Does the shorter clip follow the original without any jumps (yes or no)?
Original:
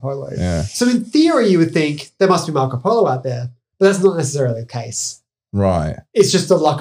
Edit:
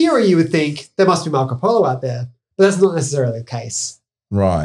yes